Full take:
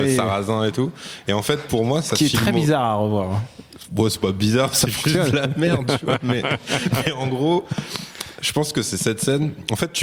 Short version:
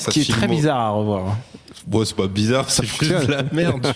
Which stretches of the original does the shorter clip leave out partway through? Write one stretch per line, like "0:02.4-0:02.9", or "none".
none

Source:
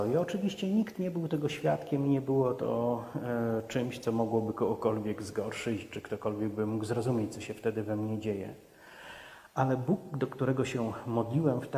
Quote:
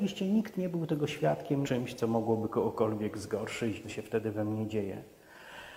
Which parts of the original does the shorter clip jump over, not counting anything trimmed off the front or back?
0:02.0-0:03.7
0:05.9-0:07.3

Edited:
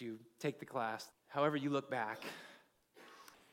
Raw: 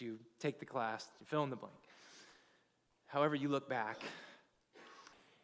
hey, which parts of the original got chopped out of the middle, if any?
0:01.1-0:02.9

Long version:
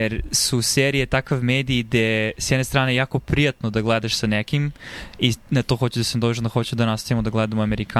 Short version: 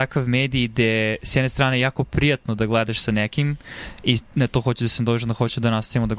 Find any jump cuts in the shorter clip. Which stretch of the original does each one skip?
none

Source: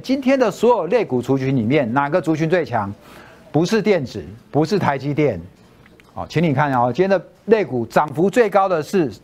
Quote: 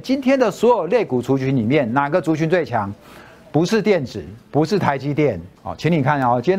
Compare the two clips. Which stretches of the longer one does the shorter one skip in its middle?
0:05.6-0:06.1

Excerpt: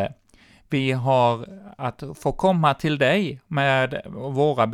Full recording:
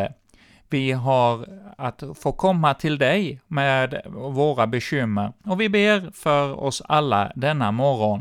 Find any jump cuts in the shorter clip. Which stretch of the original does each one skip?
none

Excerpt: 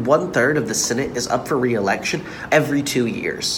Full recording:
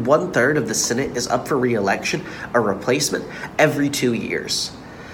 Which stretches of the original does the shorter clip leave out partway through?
0:02.5-0:03.6

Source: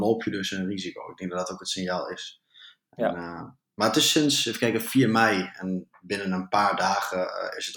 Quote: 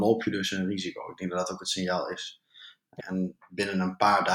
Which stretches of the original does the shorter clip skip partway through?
0:03.0-0:05.5

